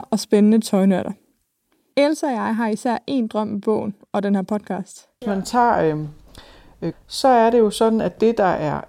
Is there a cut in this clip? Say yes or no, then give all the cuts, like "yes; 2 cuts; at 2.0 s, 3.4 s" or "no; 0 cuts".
yes; 2 cuts; at 5.2 s, 6.9 s